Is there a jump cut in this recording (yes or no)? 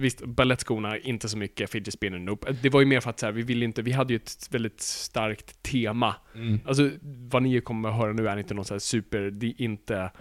yes